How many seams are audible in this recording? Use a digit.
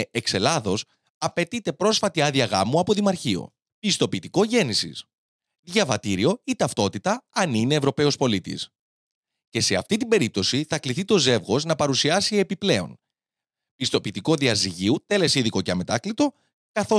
0